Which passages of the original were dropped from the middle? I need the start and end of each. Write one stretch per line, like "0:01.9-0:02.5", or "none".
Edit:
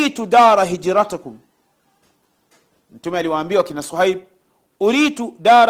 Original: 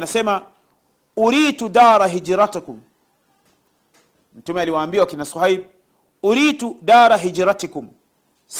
none